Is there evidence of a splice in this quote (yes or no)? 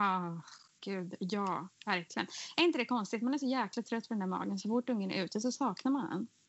no